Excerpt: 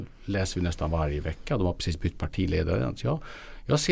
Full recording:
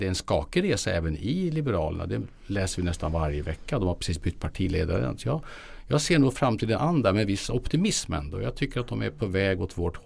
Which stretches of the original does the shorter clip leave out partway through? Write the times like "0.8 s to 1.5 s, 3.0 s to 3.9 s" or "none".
none